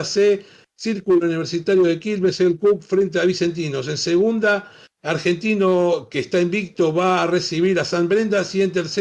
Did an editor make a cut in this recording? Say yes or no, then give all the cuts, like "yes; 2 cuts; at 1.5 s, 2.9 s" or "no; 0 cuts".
no; 0 cuts